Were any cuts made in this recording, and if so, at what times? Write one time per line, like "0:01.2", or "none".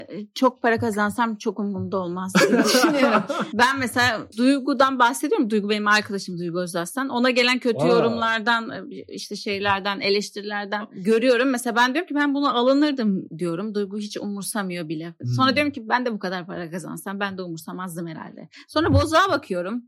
none